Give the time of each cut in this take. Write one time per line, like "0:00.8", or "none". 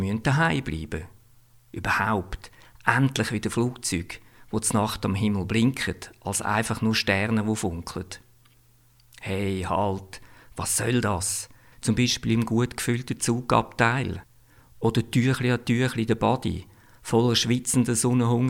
0:11.7